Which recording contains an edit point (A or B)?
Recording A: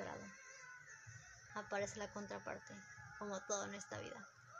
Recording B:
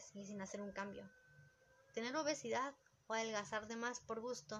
A